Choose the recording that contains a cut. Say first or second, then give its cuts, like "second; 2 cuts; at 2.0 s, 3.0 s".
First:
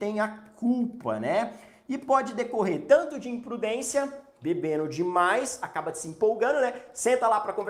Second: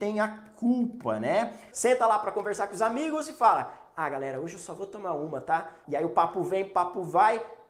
second; 2 cuts; at 1.7 s, 5.8 s